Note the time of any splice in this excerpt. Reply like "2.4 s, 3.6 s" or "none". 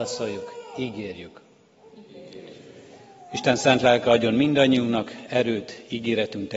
none